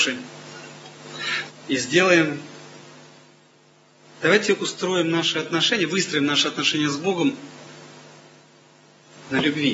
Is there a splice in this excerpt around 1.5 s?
yes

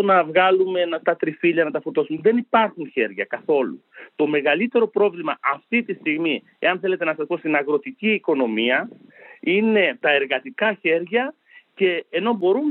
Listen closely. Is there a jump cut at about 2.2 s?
no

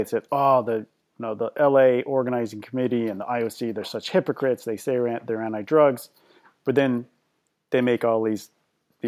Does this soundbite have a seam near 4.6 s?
no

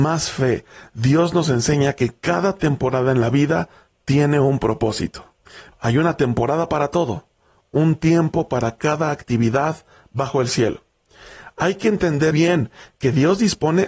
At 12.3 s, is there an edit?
yes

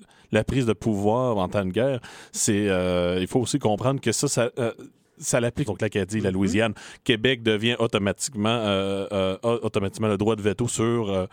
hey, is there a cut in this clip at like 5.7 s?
yes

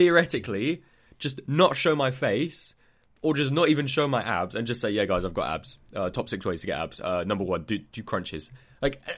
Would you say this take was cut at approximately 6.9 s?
no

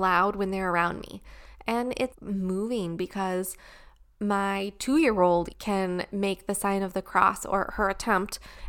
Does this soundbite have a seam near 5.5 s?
yes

